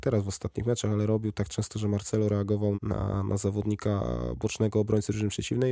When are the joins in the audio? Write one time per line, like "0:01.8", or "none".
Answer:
0:02.7